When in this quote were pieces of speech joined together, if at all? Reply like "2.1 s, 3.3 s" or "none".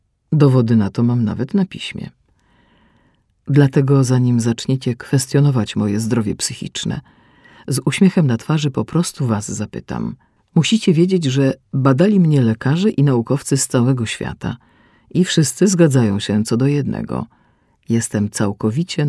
10.4 s